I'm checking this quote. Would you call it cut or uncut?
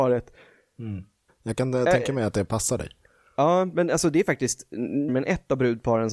cut